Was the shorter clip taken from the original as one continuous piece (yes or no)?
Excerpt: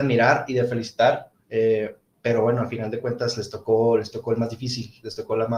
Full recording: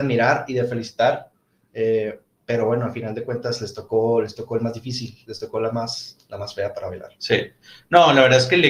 no